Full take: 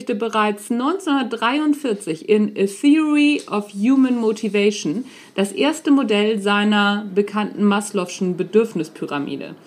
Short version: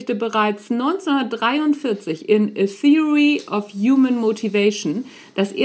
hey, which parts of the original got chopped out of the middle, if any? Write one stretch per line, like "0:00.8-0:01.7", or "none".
none

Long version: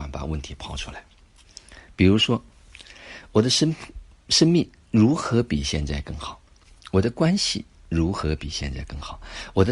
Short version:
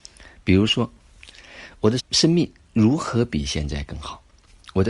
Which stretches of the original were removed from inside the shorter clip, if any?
0:03.5-0:04.1

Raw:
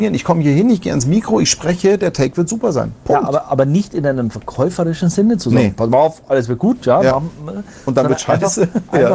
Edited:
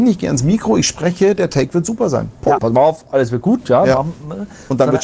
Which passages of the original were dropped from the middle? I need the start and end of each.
0:03.2-0:05.8

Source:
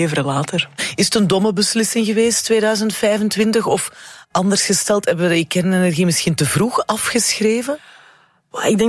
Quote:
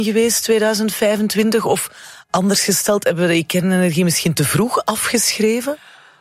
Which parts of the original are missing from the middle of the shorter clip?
none

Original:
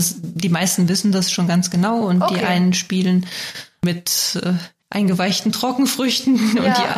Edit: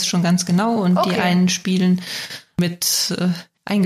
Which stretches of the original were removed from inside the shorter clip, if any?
none

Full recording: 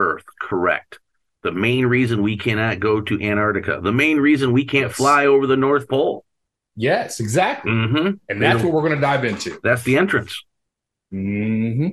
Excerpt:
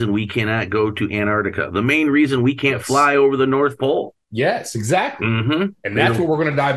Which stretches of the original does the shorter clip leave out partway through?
0:06.3-0:06.7

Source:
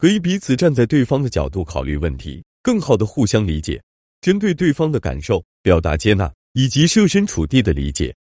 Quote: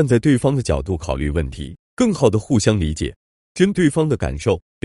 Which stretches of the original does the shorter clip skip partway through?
0:04.4-0:04.6

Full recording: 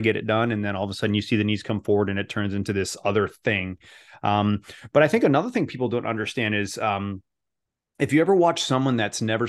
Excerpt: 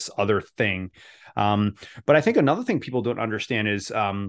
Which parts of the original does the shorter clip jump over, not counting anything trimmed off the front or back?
none

